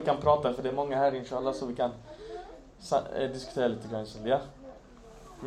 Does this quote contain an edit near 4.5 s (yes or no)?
no